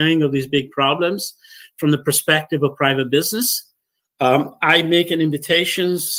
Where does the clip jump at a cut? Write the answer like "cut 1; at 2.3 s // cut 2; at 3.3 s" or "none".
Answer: cut 1; at 4.0 s